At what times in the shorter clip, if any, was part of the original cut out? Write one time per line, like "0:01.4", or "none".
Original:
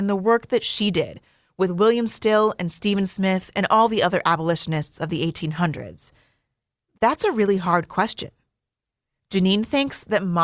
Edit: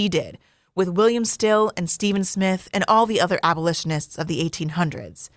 none